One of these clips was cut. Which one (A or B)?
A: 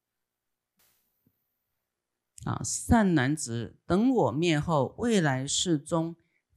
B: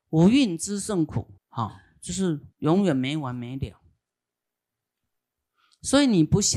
B